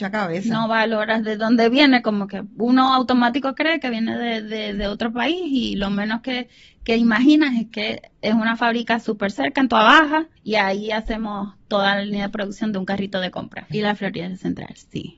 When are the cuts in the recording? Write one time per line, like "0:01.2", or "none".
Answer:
0:10.4
0:13.7